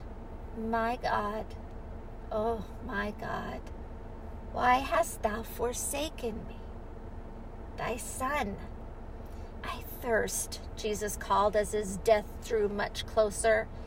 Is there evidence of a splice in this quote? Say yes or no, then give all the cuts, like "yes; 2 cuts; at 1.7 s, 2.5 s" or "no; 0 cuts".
yes; 1 cut; at 9.6 s